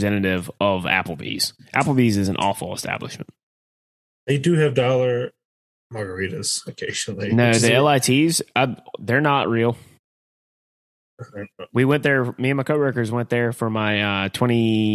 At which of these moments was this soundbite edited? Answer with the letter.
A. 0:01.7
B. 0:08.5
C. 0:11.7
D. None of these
D